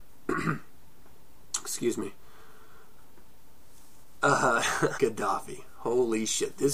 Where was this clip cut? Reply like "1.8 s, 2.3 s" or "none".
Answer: 5.0 s